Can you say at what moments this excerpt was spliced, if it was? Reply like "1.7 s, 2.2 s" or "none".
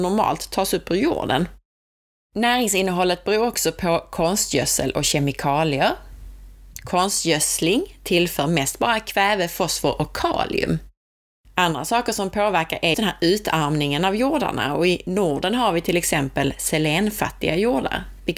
2.2 s, 11.4 s, 12.9 s